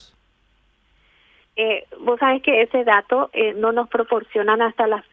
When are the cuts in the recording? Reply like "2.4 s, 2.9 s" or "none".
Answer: 3.5 s